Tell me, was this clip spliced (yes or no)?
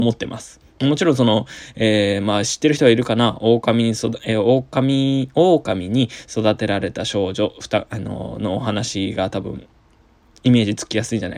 no